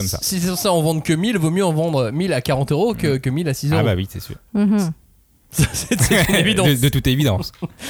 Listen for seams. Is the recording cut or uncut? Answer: uncut